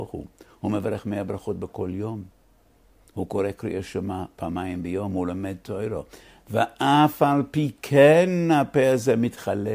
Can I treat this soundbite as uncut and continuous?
yes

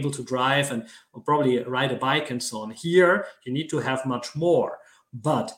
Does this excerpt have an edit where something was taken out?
no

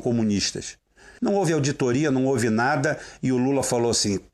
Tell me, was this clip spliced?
yes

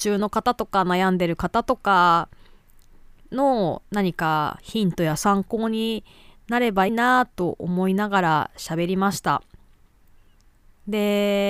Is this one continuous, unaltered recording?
no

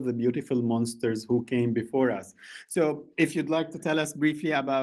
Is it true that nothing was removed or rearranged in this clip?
yes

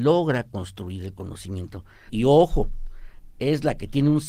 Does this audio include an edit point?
yes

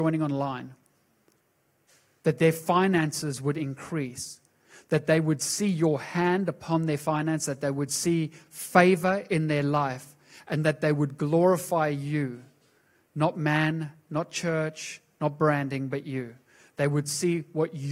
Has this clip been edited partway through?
no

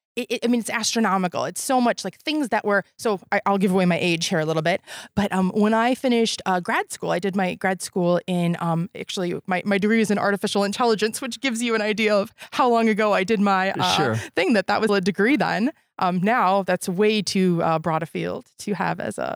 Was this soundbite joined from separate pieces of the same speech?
yes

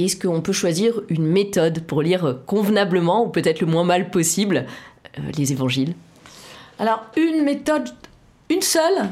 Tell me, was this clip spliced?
no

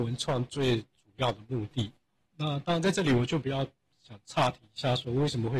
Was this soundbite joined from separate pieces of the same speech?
yes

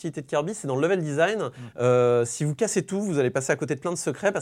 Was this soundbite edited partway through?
no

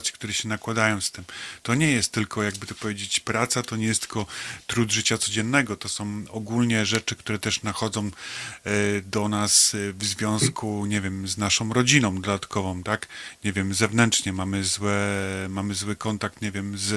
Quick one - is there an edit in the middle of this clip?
no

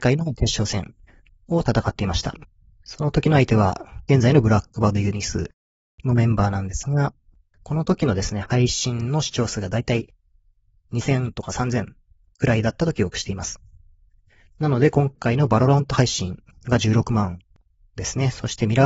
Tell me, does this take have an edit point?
no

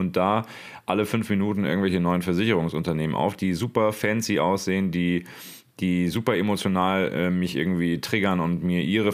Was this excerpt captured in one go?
yes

